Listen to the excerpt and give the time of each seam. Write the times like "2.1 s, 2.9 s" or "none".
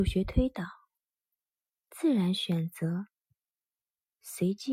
none